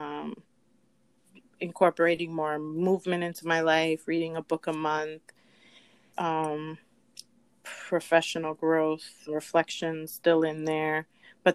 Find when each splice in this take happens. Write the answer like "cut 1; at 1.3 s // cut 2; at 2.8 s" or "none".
cut 1; at 6.1 s // cut 2; at 9.3 s